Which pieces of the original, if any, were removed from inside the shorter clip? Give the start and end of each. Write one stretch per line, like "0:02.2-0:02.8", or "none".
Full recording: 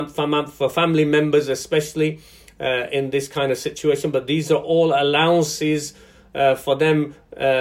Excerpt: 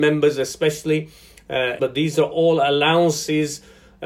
0:02.9-0:04.1